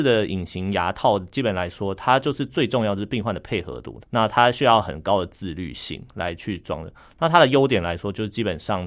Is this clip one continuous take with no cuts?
no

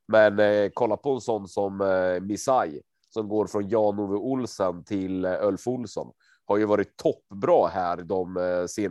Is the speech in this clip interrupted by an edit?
no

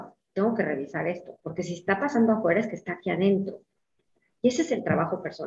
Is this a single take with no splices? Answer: no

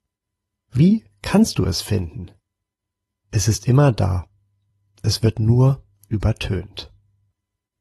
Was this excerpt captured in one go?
yes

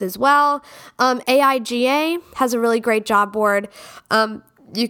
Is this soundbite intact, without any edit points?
no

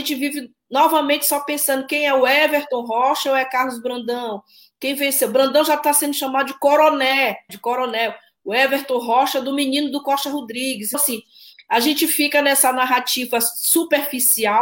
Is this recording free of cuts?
no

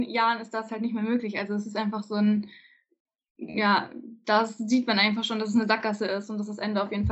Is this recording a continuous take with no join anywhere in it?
yes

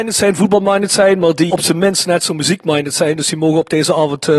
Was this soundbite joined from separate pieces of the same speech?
no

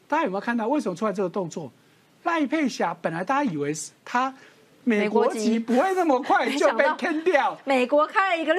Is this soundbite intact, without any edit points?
yes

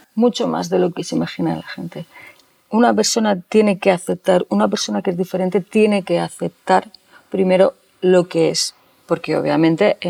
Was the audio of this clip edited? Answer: no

